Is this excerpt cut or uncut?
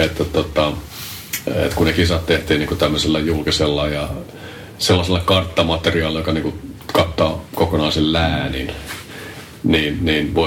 uncut